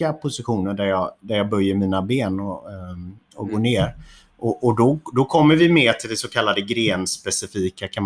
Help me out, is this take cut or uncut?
uncut